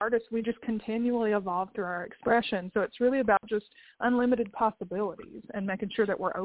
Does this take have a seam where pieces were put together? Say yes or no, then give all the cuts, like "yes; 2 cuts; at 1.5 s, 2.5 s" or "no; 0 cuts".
no; 0 cuts